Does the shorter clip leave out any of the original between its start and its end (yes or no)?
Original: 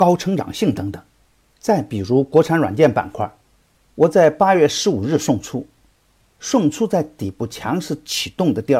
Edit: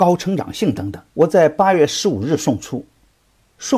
yes